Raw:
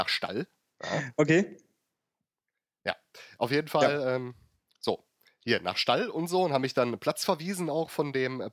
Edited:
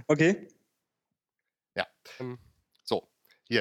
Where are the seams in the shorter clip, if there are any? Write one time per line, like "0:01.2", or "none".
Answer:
0:02.2